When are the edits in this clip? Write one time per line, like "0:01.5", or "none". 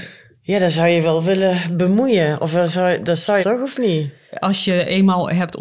0:03.4